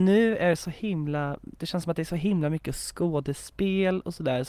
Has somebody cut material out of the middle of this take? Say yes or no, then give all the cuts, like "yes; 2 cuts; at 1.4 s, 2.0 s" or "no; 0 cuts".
no; 0 cuts